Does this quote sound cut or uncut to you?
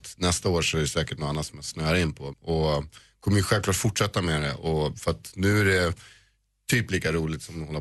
cut